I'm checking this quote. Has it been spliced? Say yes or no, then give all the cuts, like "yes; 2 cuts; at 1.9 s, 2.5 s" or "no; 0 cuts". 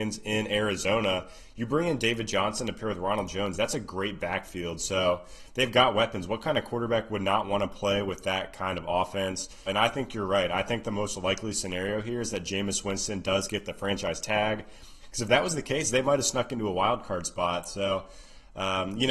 yes; 2 cuts; at 9.7 s, 15.0 s